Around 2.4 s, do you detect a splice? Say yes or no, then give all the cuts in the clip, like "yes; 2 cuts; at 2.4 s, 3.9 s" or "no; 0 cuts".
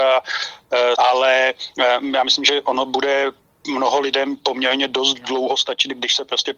no; 1 cut; at 0.9 s